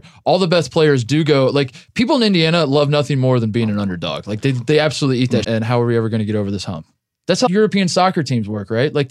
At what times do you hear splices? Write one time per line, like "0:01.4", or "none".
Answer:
0:05.4
0:07.5